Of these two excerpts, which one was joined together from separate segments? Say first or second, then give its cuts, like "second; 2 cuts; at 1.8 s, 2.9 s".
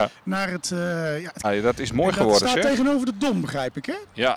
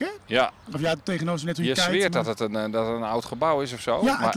first; 1 cut; at 1.4 s